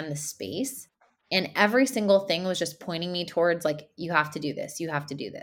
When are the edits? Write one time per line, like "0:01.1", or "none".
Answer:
none